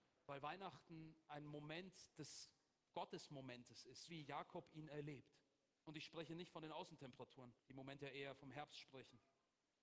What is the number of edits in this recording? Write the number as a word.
three